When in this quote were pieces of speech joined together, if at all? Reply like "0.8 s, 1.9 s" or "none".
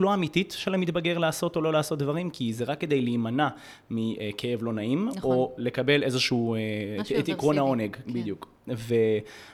8.0 s

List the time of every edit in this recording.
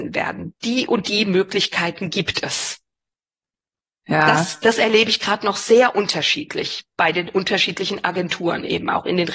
none

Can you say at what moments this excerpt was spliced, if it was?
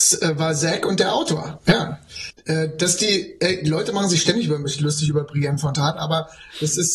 2.3 s

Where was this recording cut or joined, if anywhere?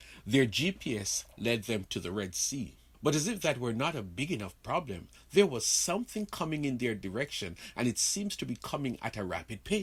2.9 s

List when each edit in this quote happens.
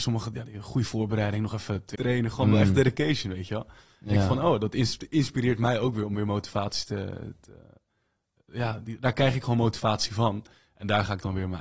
1.9 s

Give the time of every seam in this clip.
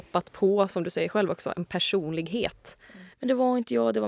3.1 s

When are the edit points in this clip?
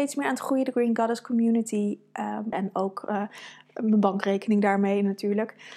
2.5 s

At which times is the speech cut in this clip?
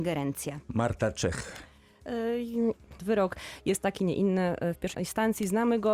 3.0 s, 4.9 s

